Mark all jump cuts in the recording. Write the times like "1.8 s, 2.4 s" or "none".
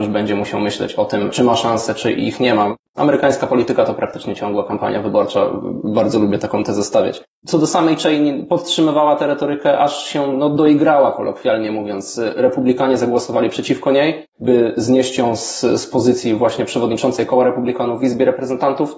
none